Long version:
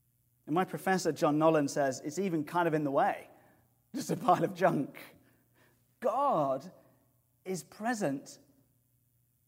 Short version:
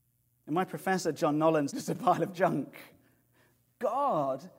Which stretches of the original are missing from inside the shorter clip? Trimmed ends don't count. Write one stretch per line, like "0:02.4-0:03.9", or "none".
0:01.7-0:03.9